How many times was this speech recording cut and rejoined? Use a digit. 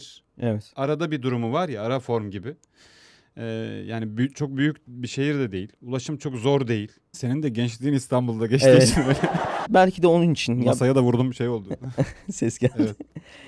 2